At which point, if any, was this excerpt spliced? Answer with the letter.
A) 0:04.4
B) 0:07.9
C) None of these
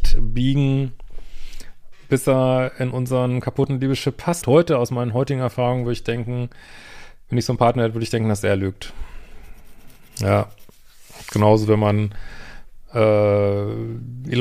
A